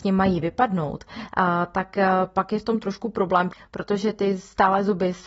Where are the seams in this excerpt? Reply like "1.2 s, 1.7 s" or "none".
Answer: none

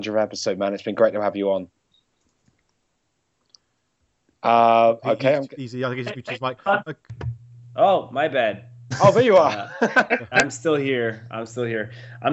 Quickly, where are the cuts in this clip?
none

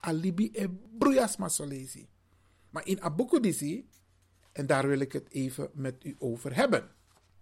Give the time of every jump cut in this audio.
4.4 s

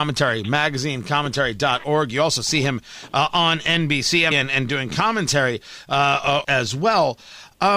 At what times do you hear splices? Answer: 4.3 s, 6.4 s

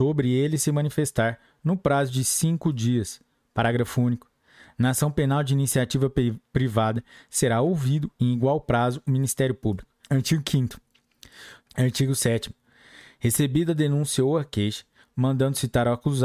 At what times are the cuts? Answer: 10.0 s, 11.6 s, 15.0 s

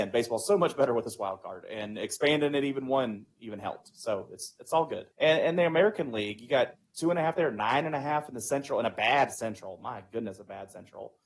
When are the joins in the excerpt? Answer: 5.1 s

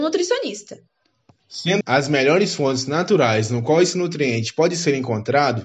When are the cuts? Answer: 1.8 s

